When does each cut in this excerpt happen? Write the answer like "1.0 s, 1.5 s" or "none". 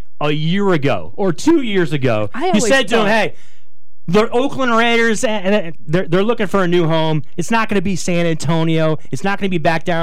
none